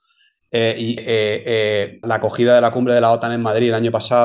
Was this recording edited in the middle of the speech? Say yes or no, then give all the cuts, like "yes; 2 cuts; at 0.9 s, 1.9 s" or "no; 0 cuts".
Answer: yes; 2 cuts; at 1.0 s, 2.0 s